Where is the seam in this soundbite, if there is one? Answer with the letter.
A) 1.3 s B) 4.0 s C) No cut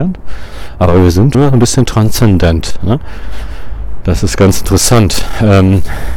A